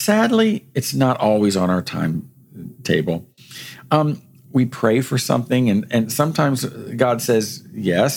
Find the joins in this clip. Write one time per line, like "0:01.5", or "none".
none